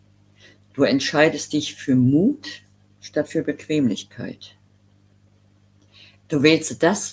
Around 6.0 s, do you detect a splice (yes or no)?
no